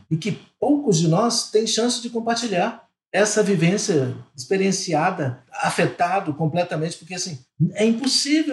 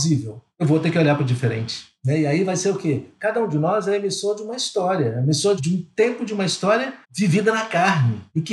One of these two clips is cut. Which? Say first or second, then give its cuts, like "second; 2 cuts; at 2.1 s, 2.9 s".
second; 1 cut; at 7.0 s